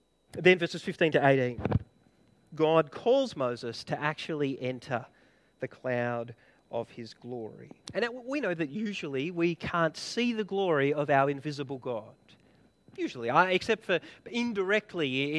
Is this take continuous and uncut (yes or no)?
no